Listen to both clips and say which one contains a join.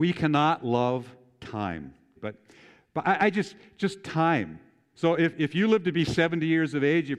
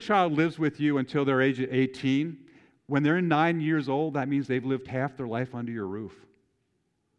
first; 2 cuts; at 2.2 s, 4.9 s

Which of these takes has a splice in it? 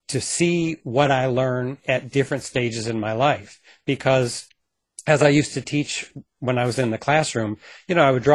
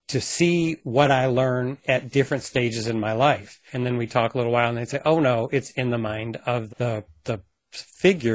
second; 2 cuts; at 3.7 s, 6.7 s

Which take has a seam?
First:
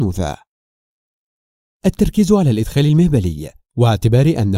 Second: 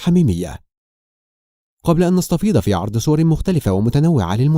second; 1 cut; at 1.6 s

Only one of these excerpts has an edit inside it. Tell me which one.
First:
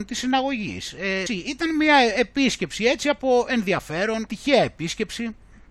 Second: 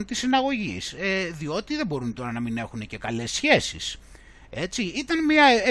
first; 2 cuts; at 1.3 s, 4.3 s

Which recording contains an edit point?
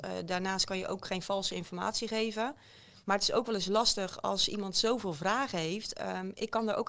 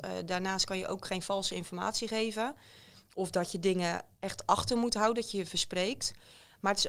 first; 1 cut; at 3.0 s

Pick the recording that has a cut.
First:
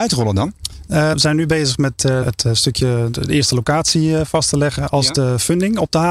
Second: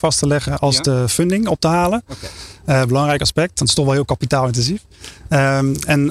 first; 2 cuts; at 1.1 s, 2.2 s

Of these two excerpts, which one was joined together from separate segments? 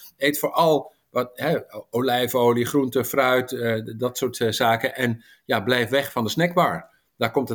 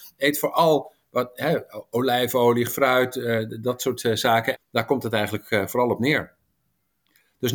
second; 2 cuts; at 2.7 s, 4.6 s

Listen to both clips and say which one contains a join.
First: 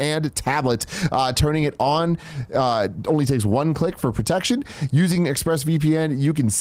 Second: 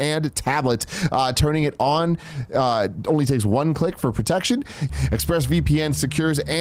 second; 1 cut; at 4.9 s

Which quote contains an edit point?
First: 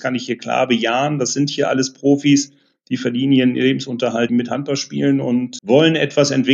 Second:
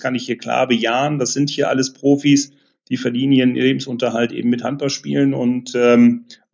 first; 2 cuts; at 4.3 s, 5.6 s

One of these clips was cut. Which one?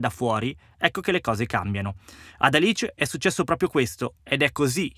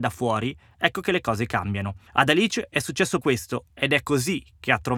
second; 2 cuts; at 2.1 s, 3.2 s

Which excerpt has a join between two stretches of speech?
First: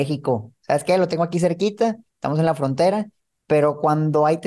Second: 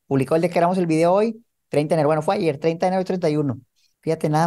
first; 1 cut; at 3.3 s

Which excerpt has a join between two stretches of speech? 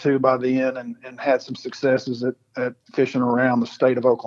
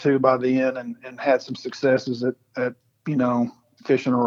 first; 1 cut; at 2.8 s

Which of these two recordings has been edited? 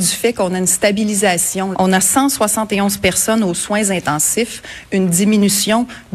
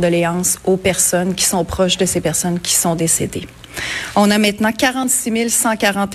first; 1 cut; at 1.7 s

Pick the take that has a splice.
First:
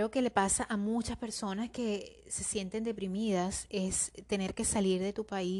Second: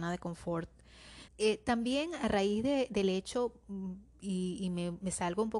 second; 1 cut; at 1.3 s

